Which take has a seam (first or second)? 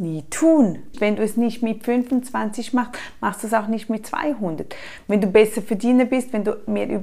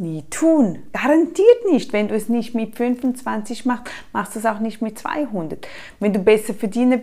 first